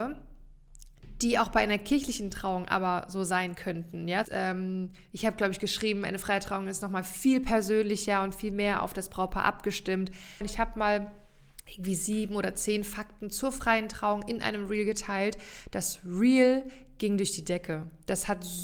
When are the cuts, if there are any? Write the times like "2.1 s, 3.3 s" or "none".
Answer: 4.2 s, 10.4 s